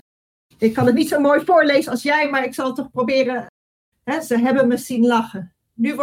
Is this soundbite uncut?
yes; 0 cuts

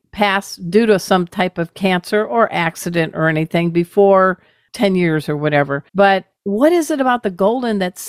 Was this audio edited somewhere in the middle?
yes; 1 cut; at 5.9 s

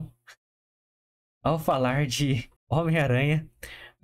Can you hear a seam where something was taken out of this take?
yes; 1 cut; at 2.6 s

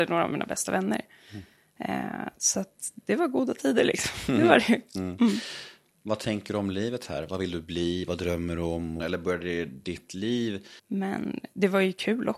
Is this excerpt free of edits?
no; 2 cuts; at 9.0 s, 10.8 s

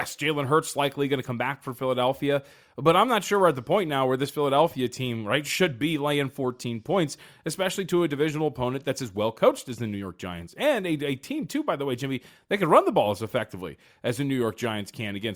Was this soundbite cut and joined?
no; 0 cuts

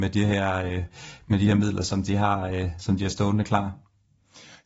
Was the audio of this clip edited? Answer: no; 0 cuts

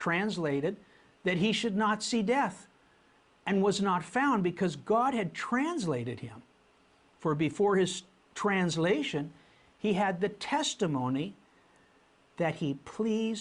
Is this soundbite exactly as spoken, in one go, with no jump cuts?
yes; 0 cuts

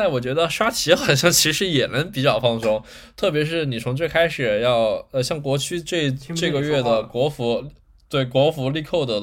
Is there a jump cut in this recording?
no; 0 cuts

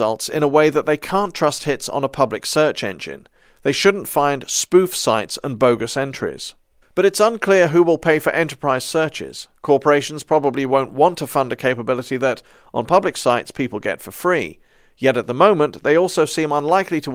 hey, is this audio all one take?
yes; 0 cuts

